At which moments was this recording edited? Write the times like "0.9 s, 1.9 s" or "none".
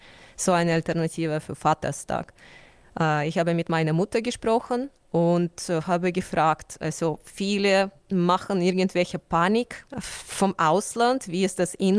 9.9 s